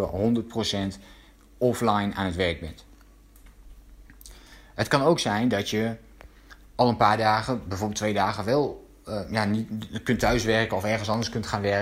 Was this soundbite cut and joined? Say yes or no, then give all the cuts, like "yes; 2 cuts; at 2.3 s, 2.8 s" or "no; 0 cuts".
no; 0 cuts